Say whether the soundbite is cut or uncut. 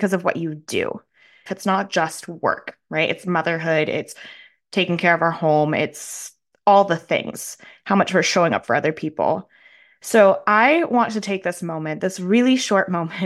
cut